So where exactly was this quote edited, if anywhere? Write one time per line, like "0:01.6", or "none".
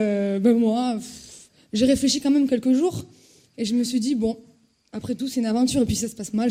none